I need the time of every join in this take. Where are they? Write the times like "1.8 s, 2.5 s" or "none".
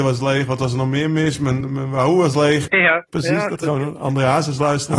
1.6 s, 2.7 s